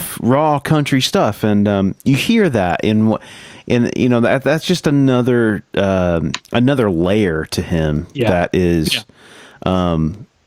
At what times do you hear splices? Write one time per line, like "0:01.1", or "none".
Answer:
none